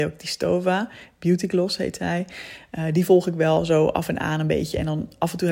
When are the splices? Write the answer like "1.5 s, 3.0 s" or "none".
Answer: none